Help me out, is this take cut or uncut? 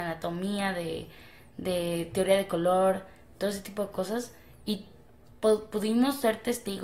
uncut